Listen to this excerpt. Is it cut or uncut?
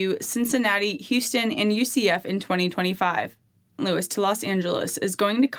cut